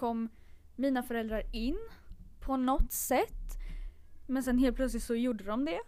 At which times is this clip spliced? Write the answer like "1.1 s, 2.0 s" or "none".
4.2 s